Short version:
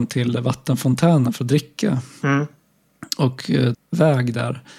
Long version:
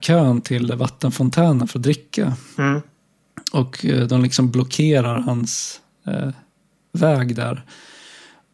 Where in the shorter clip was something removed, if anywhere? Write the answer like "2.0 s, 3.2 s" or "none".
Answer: 3.7 s